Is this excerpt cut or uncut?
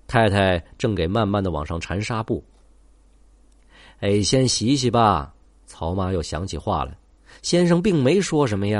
uncut